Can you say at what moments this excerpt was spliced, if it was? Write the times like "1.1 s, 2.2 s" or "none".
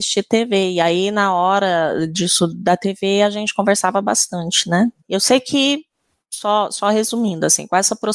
5.0 s

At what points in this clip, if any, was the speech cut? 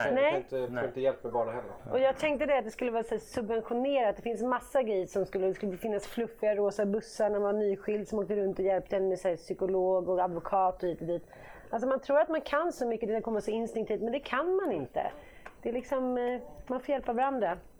none

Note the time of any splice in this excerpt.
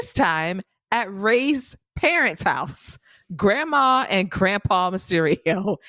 none

